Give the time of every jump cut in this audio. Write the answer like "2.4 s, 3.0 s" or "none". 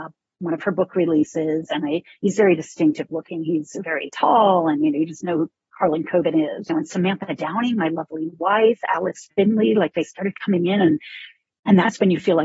6.7 s